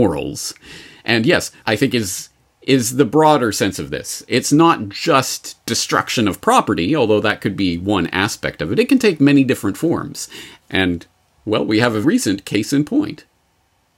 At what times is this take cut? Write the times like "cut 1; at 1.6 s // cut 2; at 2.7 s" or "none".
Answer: cut 1; at 1.6 s // cut 2; at 10.6 s // cut 3; at 12.0 s

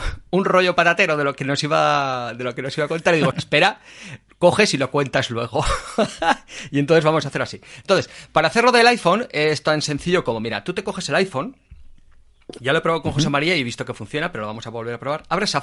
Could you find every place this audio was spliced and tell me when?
cut 1; at 3.3 s

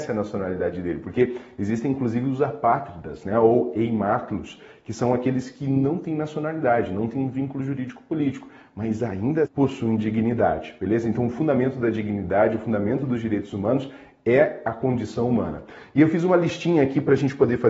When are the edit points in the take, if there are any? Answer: cut 1; at 9.4 s

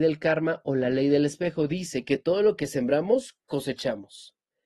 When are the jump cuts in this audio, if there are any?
none

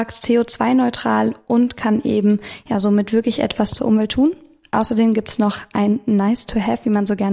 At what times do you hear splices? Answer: none

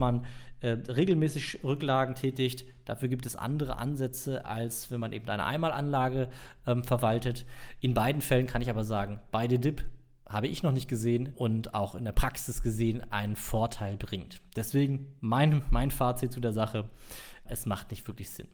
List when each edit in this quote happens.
cut 1; at 11.3 s // cut 2; at 17.5 s

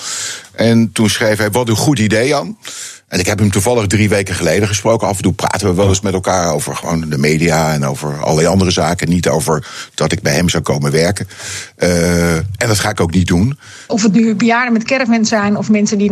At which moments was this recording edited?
cut 1; at 13.9 s

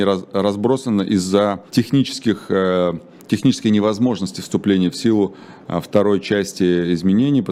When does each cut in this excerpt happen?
cut 1; at 1.7 s

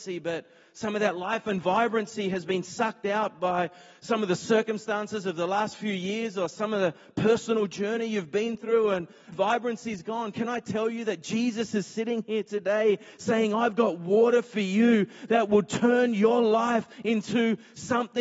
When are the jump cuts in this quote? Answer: cut 1; at 9.3 s

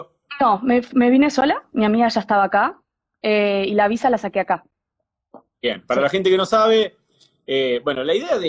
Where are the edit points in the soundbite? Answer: cut 1; at 5.5 s

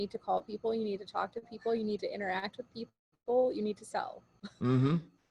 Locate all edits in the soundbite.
none

